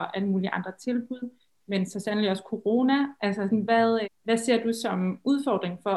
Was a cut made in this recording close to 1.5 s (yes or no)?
no